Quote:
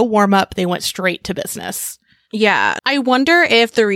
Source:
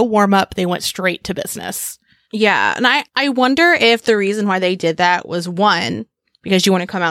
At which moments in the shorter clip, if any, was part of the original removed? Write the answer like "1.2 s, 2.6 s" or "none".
2.8 s